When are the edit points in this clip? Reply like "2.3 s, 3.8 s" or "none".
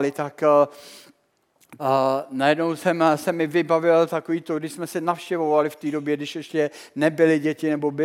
1.8 s